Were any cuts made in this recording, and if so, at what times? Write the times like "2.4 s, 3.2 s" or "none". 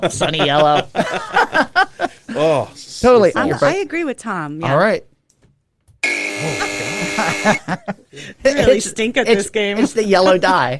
3.3 s